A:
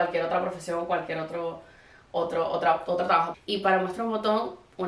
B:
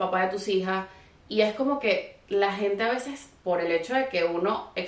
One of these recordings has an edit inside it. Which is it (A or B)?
A